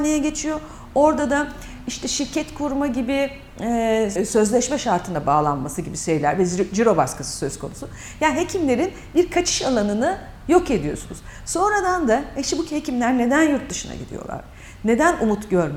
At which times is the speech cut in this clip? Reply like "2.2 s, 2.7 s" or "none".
4.2 s